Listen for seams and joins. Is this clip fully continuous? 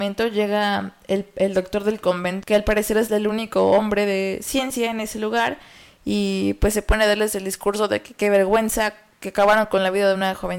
no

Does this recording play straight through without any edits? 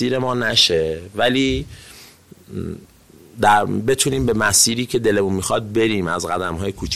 yes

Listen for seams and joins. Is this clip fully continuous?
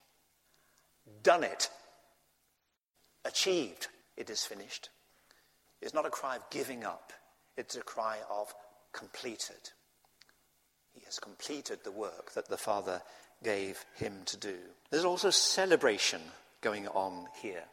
no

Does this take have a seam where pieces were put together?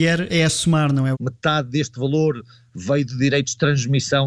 yes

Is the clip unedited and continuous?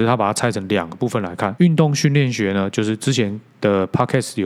no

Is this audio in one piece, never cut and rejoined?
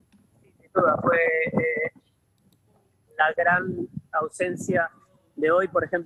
yes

